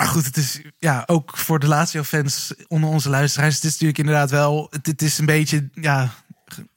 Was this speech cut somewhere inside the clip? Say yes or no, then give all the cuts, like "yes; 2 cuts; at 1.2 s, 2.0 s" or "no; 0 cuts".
yes; 1 cut; at 4.7 s